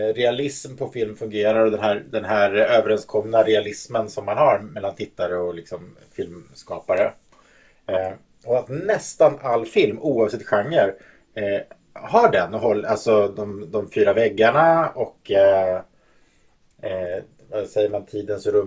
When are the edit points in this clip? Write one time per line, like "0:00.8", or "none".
none